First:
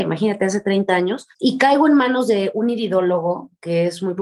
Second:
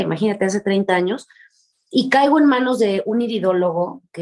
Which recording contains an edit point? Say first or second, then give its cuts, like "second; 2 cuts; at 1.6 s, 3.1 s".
first; 1 cut; at 1.3 s